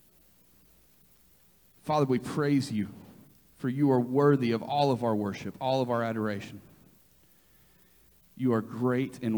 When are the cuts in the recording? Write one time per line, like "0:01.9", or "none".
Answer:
none

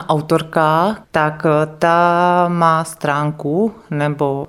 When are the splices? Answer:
0:01.0

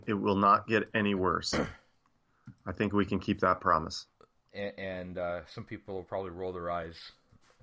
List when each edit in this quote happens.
0:04.5

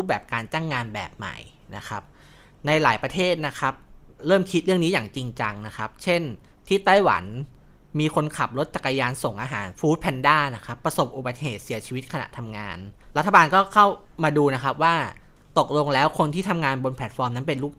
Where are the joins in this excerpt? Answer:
0:04.2

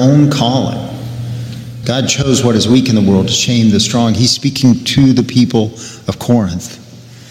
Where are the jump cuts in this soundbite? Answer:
0:01.8

